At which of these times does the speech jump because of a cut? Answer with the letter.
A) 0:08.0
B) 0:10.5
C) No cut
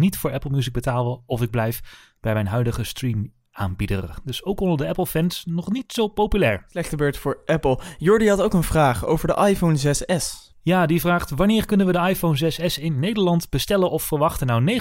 B